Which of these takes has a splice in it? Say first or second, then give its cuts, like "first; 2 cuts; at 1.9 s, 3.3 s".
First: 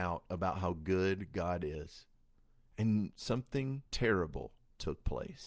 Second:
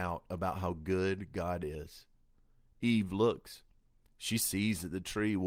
first; 2 cuts; at 2.7 s, 3.9 s